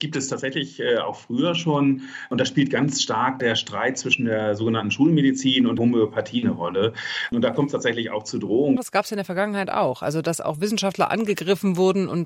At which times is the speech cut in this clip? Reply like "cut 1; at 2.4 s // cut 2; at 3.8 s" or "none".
cut 1; at 7.3 s // cut 2; at 8.8 s